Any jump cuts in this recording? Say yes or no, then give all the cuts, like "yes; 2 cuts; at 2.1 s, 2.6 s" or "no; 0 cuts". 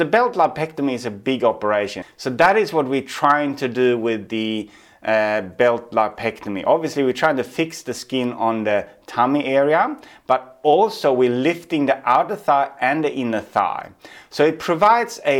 yes; 1 cut; at 2.0 s